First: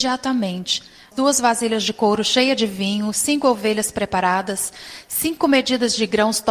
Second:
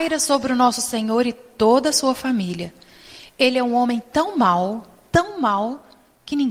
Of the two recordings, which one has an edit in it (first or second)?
first